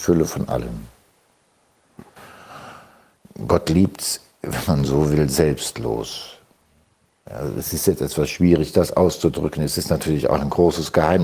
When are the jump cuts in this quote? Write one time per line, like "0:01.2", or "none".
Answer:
none